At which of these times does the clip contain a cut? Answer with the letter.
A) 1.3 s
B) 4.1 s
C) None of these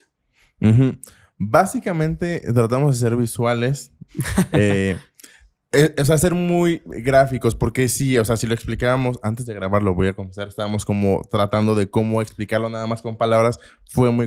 B